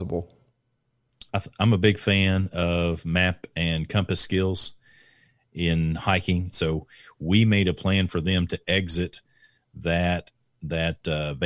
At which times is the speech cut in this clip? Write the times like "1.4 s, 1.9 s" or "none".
6.5 s